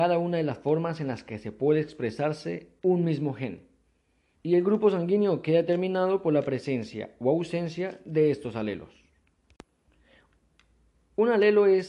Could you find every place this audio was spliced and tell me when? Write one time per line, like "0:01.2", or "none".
0:04.4